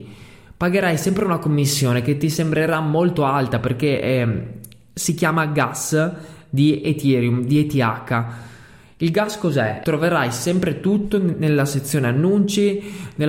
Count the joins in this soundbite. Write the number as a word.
one